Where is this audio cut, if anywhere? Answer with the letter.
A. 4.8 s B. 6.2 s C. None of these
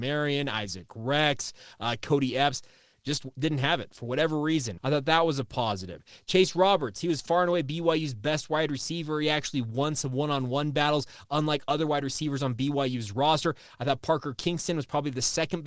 A